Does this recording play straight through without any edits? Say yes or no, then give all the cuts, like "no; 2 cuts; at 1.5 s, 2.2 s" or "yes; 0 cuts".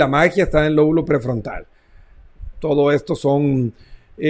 no; 1 cut; at 2.5 s